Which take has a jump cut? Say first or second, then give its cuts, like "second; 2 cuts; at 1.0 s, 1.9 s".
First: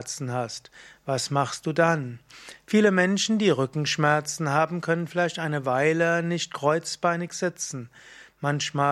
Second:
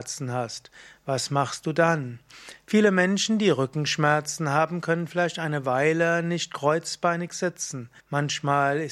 second; 1 cut; at 8.0 s